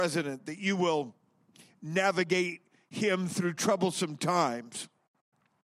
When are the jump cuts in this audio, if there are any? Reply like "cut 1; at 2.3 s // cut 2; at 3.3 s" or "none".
none

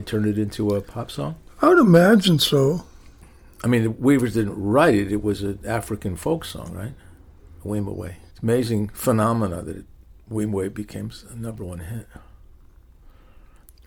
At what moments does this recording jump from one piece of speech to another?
cut 1; at 8.3 s

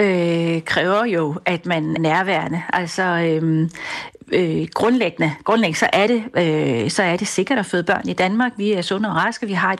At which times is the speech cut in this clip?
cut 1; at 2.0 s

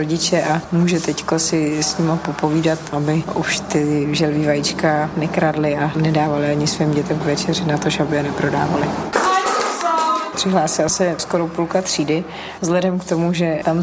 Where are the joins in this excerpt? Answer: cut 1; at 10.3 s

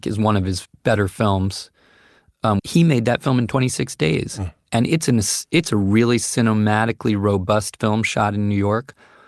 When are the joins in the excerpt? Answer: cut 1; at 2.6 s

